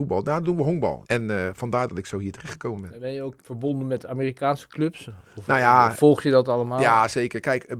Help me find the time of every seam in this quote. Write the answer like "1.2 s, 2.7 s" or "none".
1.0 s, 3.4 s